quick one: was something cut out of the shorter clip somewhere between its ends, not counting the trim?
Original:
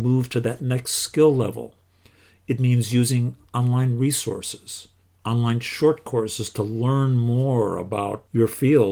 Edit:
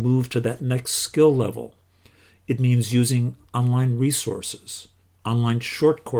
no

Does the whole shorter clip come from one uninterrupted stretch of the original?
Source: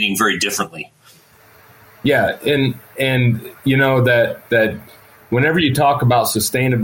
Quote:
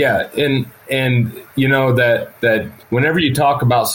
no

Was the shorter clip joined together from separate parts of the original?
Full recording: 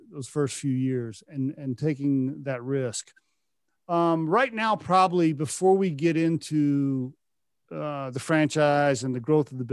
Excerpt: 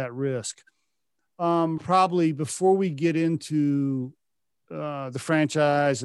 yes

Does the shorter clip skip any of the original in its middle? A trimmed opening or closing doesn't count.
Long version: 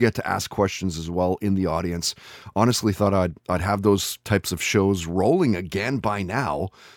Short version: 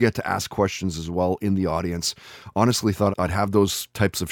yes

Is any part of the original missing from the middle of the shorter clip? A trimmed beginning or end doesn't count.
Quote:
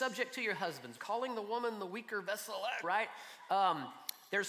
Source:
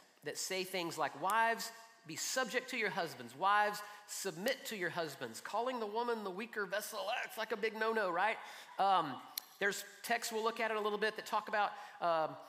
yes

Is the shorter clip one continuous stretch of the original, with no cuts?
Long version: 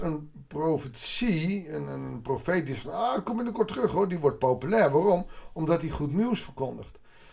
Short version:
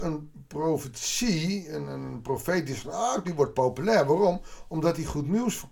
no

